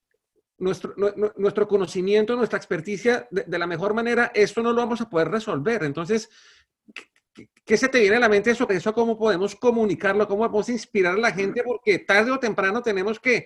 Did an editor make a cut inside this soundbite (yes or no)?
yes